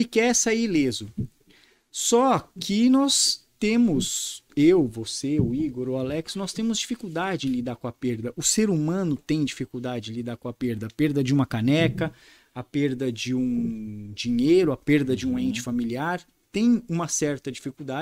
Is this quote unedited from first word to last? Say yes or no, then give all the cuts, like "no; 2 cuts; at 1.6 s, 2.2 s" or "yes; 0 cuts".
yes; 0 cuts